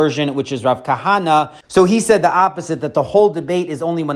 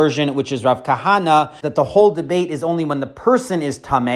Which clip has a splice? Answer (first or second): second